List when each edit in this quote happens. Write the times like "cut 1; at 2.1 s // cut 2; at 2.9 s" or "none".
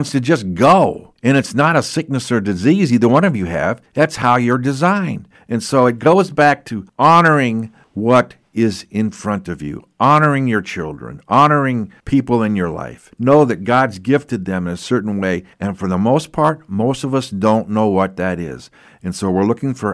none